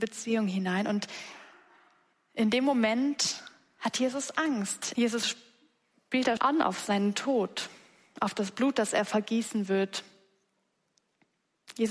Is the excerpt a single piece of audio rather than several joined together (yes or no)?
no